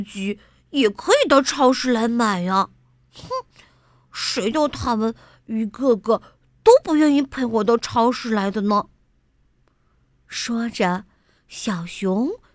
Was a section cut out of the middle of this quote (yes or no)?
no